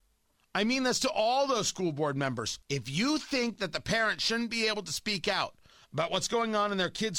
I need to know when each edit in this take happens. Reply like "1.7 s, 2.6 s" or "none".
2.6 s